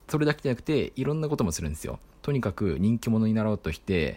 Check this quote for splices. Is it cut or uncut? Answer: uncut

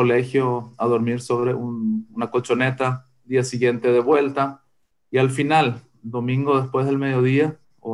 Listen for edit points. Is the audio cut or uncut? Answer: uncut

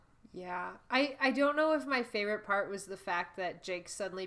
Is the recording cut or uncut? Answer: uncut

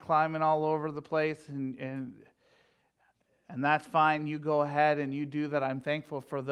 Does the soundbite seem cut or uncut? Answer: uncut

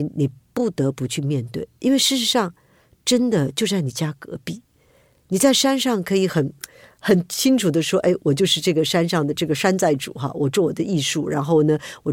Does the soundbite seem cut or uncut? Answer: uncut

